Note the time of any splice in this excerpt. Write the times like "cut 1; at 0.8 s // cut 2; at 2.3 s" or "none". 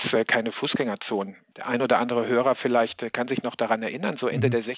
cut 1; at 1.5 s

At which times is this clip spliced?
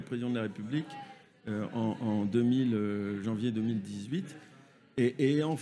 cut 1; at 3.2 s

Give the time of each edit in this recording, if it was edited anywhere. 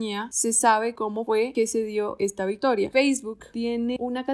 cut 1; at 2.9 s

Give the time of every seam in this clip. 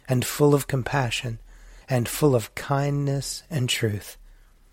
cut 1; at 1.8 s

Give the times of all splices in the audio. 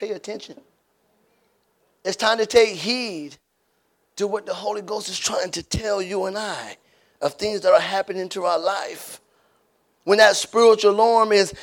none

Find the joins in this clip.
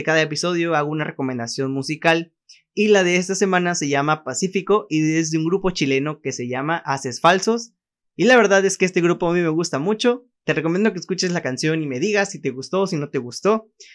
none

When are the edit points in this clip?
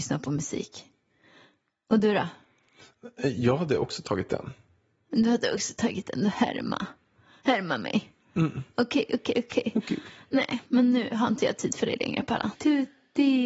cut 1; at 12.5 s

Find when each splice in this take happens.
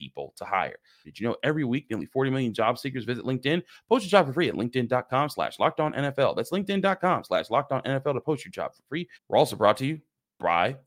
cut 1; at 1.0 s // cut 2; at 9.1 s

